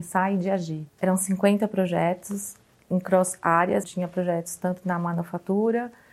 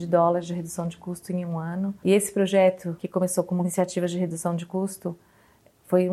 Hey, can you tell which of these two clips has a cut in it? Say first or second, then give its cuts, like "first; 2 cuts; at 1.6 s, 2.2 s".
first; 2 cuts; at 1.0 s, 3.8 s